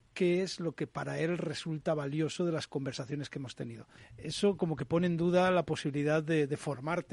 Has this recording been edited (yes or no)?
yes